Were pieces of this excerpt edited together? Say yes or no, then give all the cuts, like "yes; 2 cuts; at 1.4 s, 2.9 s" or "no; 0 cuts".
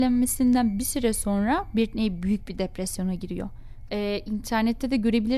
yes; 1 cut; at 3.9 s